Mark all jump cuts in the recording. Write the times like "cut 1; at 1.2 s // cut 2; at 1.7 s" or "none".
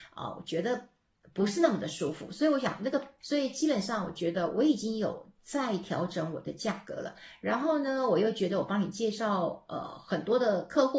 cut 1; at 3.2 s